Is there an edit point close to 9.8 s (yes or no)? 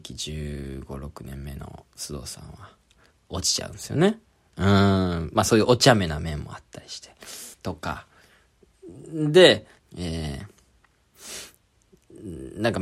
yes